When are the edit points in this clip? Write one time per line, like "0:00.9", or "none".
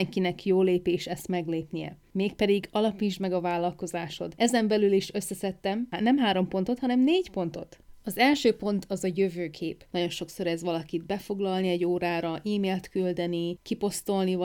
0:09.9